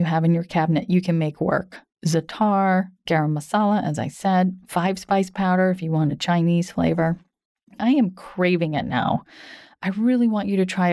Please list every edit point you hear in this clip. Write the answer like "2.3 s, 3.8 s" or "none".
3.0 s, 7.8 s